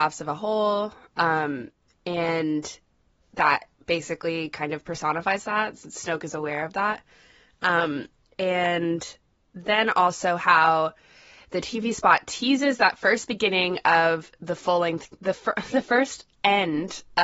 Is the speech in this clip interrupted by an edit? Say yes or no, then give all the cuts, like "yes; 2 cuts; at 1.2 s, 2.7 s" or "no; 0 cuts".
no; 0 cuts